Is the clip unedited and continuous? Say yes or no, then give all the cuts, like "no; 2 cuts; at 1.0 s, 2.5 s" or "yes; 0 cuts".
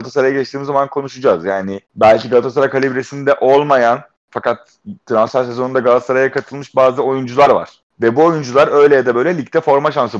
no; 1 cut; at 1.8 s